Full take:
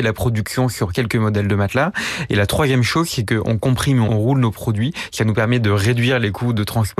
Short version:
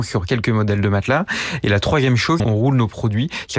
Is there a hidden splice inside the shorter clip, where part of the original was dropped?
yes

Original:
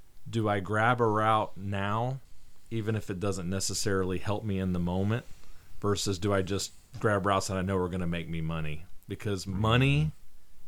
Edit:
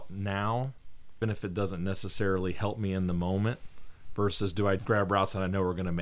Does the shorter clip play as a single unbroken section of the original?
no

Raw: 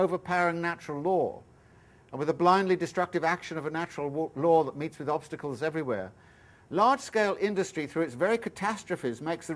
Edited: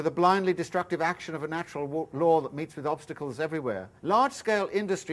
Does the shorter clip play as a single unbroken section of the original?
no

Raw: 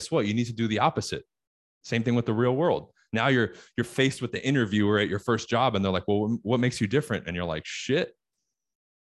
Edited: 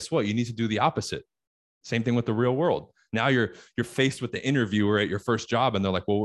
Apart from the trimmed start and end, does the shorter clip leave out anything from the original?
no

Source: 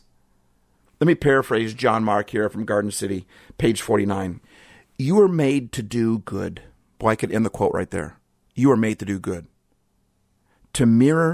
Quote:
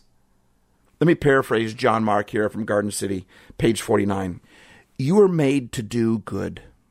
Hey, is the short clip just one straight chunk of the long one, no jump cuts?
yes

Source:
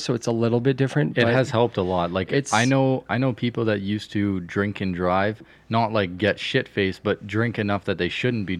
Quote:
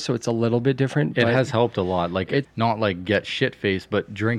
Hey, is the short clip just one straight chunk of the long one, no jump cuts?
no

